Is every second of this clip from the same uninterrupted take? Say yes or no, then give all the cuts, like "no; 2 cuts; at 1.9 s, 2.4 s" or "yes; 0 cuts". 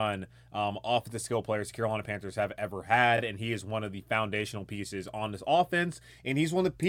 yes; 0 cuts